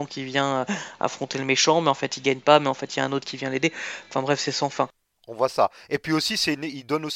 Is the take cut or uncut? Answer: uncut